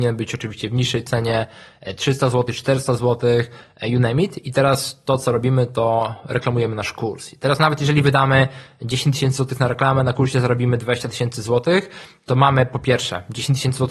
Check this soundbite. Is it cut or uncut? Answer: uncut